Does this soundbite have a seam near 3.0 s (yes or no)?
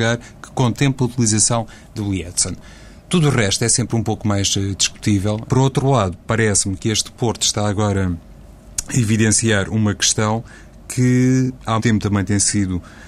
no